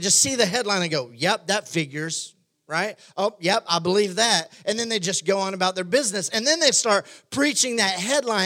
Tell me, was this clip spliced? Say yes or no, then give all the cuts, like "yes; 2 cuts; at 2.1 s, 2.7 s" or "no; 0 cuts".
no; 0 cuts